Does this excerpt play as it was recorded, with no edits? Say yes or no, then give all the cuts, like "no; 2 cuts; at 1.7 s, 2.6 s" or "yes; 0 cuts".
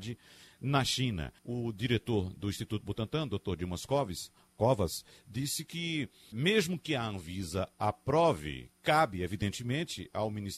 no; 2 cuts; at 1.4 s, 6.3 s